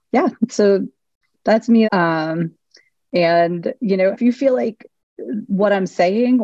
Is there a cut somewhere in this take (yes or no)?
yes